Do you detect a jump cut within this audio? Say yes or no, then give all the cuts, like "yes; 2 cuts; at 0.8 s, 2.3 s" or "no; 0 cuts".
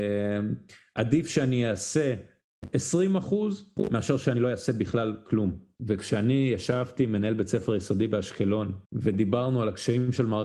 yes; 2 cuts; at 5.8 s, 8.9 s